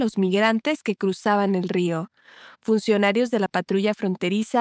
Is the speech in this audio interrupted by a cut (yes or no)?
no